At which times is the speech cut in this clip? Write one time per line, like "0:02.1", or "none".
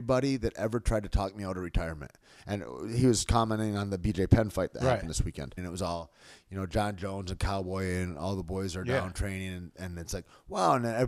0:05.6